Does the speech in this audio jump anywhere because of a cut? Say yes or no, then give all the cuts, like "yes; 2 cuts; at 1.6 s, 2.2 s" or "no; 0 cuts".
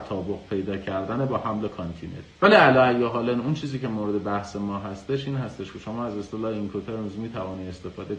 yes; 1 cut; at 2.3 s